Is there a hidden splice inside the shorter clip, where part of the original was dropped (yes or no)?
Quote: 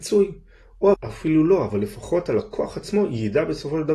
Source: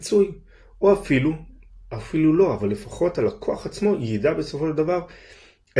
yes